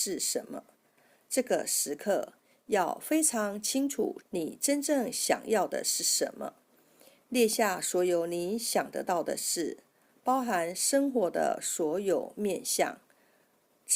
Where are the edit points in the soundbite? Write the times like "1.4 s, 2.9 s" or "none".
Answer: 4.2 s